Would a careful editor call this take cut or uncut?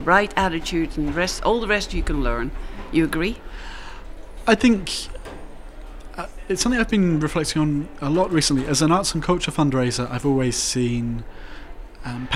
uncut